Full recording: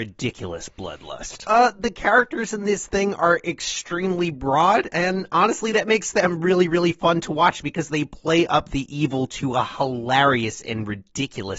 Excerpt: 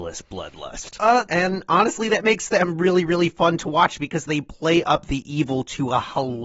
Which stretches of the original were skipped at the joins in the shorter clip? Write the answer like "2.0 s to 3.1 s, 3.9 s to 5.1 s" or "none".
1.7 s to 4.9 s